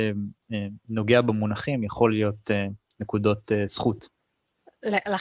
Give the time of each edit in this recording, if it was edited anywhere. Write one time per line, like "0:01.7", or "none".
none